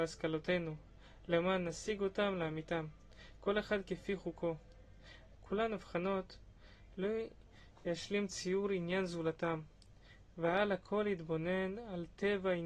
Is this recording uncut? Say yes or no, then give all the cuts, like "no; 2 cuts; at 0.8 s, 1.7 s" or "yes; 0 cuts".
no; 1 cut; at 5.3 s